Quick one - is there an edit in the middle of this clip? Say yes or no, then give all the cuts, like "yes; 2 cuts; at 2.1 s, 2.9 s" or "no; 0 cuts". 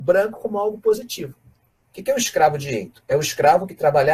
yes; 1 cut; at 1.8 s